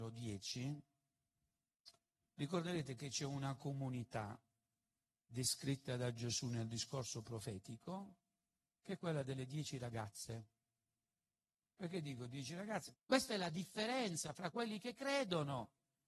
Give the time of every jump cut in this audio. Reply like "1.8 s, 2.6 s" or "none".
11.6 s, 12.9 s